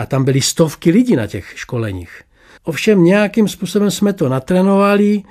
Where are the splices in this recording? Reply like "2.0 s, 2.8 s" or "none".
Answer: 2.6 s